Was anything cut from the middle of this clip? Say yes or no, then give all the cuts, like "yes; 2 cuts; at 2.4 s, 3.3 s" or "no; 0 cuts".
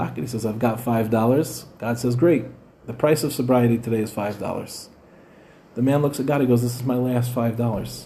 no; 0 cuts